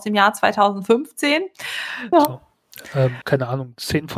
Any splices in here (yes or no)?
yes